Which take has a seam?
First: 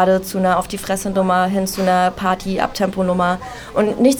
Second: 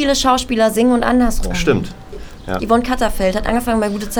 second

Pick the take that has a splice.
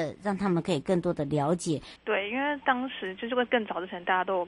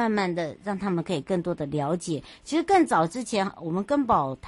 first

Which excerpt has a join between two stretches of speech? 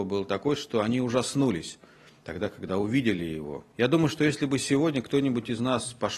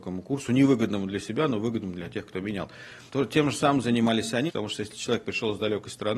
second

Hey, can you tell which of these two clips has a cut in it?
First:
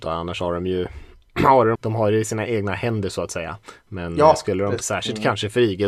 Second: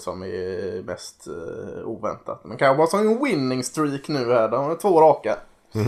first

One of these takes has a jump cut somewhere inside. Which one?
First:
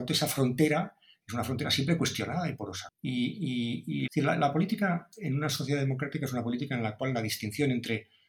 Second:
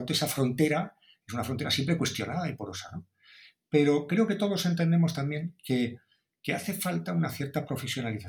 first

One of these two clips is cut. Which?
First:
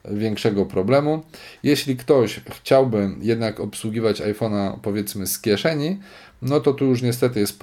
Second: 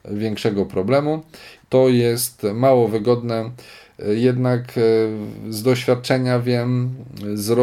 second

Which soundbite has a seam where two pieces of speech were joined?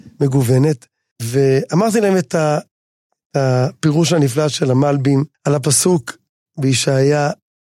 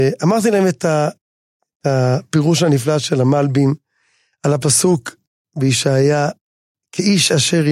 first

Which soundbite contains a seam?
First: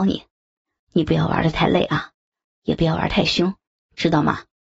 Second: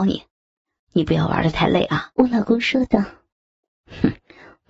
second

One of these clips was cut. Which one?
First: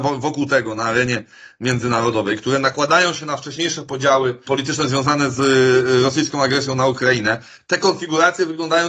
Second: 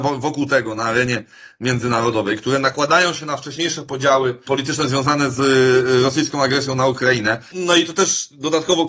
second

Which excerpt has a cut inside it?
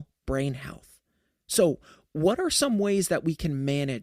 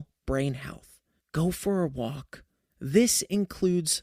second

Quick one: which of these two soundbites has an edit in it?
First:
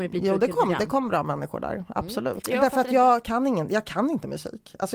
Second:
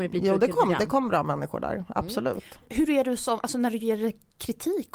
first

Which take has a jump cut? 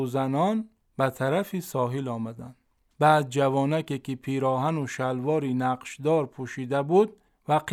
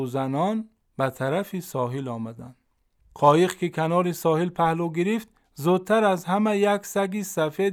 first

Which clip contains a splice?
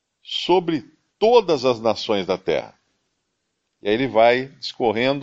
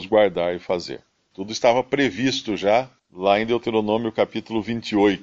second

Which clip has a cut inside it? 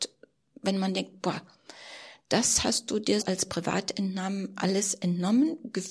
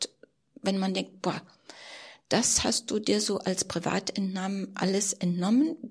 first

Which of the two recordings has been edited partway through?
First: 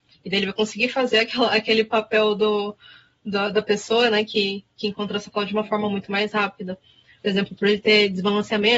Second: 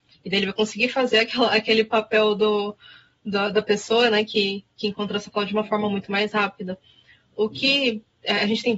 first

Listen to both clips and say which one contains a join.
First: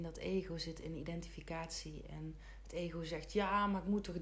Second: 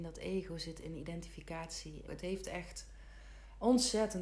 second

